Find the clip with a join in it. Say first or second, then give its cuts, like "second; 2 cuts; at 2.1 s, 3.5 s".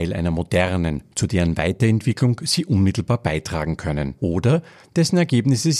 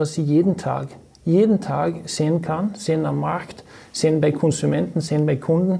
first; 2 cuts; at 1.1 s, 4.2 s